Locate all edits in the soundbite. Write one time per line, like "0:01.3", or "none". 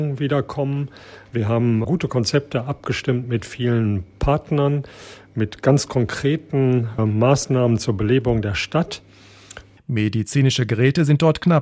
0:01.8
0:07.0
0:09.8